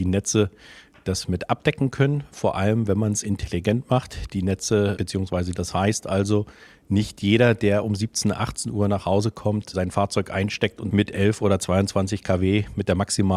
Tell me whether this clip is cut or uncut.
cut